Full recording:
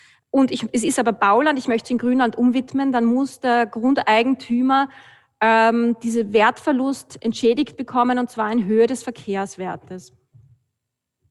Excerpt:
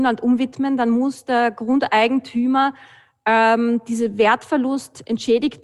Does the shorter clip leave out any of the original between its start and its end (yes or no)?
no